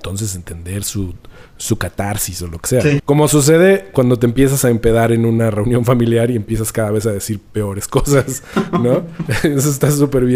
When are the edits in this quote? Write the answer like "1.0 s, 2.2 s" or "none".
3.0 s